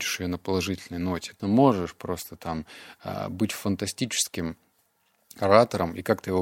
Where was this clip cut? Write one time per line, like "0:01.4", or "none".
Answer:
0:01.4